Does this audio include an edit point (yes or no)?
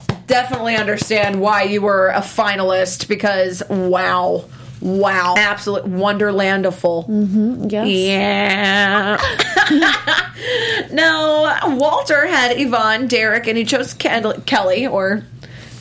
yes